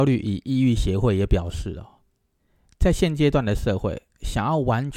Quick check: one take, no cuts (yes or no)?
yes